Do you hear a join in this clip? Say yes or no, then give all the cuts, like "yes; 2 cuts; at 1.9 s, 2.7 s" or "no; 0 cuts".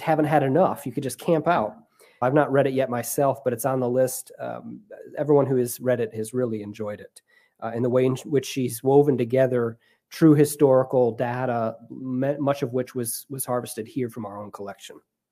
yes; 1 cut; at 2.2 s